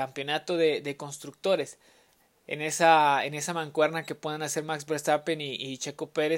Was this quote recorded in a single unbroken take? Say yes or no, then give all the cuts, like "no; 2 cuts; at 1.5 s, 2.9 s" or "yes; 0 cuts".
yes; 0 cuts